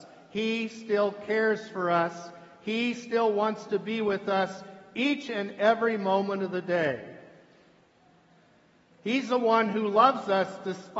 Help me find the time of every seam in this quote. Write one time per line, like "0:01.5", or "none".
0:08.9